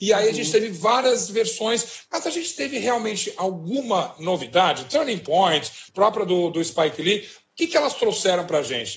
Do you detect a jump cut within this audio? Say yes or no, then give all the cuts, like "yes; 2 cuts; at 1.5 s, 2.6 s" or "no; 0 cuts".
yes; 1 cut; at 5.9 s